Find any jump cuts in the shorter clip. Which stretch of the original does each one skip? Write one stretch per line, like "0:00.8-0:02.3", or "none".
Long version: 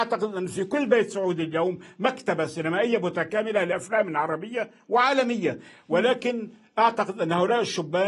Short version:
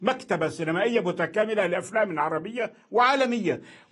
none